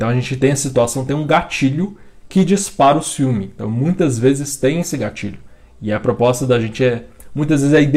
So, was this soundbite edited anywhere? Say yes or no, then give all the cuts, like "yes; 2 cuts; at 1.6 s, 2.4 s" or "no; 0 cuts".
no; 0 cuts